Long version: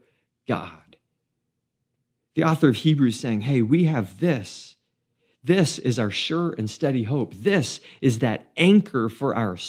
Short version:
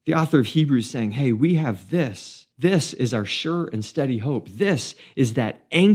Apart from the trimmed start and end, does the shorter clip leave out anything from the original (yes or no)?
yes